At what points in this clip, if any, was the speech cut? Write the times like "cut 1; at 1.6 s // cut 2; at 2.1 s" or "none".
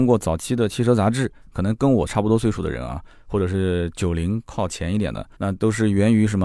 cut 1; at 5.3 s